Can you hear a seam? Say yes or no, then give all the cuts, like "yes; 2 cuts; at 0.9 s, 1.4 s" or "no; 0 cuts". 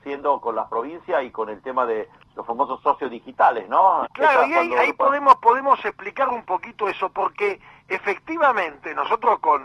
yes; 1 cut; at 4.0 s